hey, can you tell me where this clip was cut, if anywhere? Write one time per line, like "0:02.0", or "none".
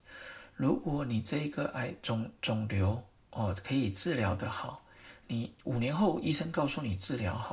none